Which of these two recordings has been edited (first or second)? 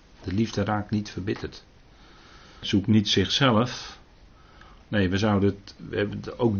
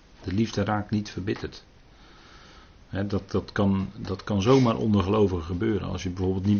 first